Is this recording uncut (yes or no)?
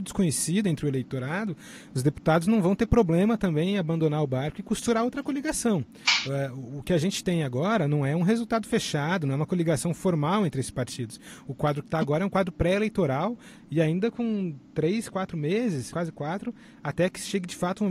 no